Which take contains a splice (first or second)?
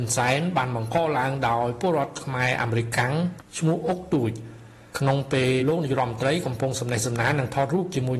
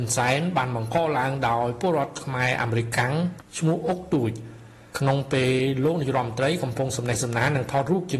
first